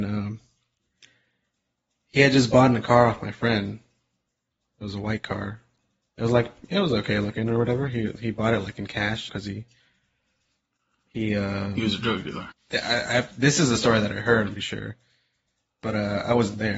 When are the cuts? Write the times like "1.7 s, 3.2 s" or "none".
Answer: 9.3 s, 12.5 s, 14.6 s